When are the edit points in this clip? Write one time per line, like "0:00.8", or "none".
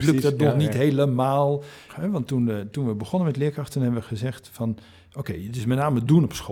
0:01.9